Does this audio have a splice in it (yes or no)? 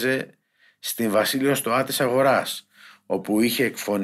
no